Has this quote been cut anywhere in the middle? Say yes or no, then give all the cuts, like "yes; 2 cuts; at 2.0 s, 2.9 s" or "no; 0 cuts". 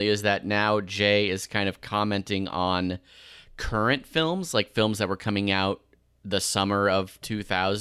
no; 0 cuts